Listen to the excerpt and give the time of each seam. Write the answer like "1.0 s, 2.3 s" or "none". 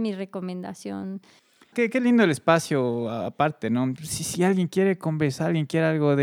1.7 s, 4.0 s